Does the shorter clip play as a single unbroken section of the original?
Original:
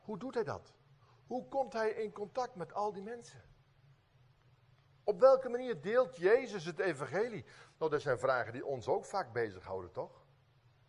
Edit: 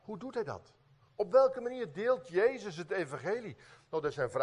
no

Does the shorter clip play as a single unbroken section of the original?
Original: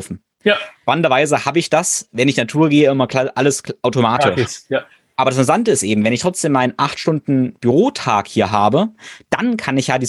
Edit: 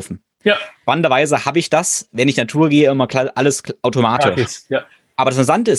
yes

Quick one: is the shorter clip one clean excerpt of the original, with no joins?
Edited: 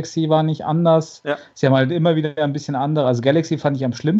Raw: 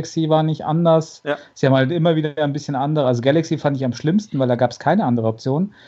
yes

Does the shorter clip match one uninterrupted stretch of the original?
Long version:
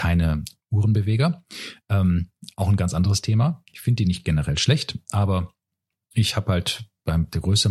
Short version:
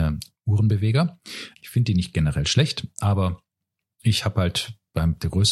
no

